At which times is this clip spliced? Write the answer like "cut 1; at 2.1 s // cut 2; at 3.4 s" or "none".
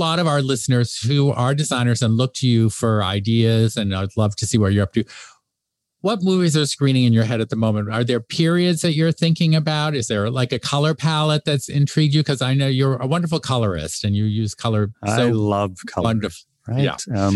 none

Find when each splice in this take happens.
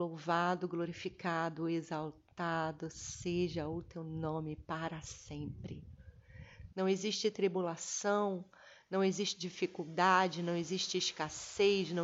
cut 1; at 6.7 s

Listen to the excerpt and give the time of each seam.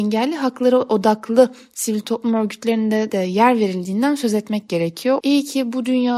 cut 1; at 3.1 s // cut 2; at 5.2 s

